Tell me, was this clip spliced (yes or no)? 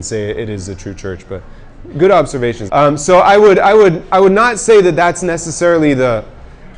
yes